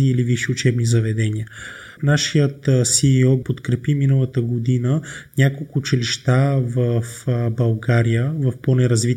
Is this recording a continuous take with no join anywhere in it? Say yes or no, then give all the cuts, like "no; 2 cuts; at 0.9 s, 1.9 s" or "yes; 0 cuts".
no; 2 cuts; at 2.0 s, 3.4 s